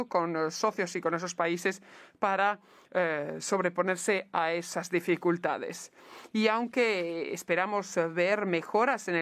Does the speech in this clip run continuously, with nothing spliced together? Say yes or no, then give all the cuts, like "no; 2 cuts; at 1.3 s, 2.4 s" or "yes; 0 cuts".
yes; 0 cuts